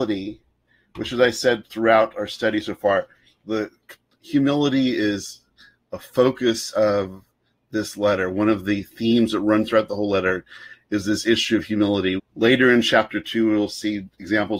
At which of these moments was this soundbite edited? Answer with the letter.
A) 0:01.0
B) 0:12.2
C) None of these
B